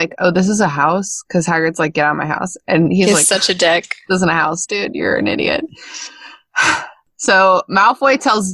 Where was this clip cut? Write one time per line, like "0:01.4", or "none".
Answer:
none